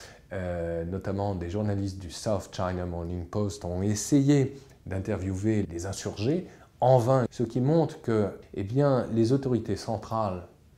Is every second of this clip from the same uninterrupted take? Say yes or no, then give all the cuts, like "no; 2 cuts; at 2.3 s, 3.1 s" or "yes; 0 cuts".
no; 3 cuts; at 5.6 s, 7.3 s, 8.4 s